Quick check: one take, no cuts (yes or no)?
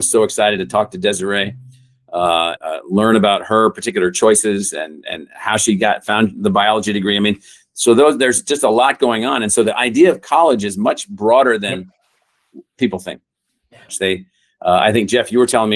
no